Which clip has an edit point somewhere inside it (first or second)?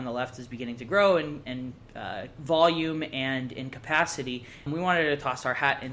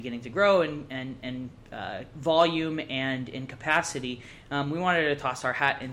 first